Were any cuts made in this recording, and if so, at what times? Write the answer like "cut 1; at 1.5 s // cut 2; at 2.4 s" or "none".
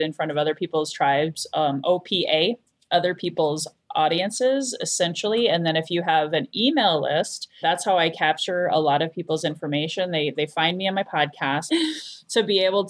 cut 1; at 7.6 s // cut 2; at 11.7 s